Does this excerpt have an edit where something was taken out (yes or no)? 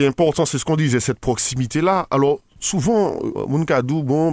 no